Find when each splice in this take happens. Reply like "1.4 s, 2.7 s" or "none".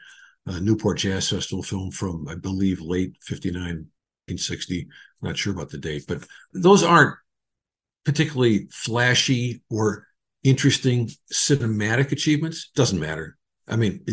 none